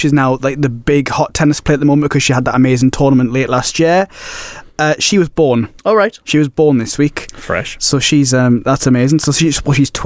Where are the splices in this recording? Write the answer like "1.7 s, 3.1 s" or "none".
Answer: 5.8 s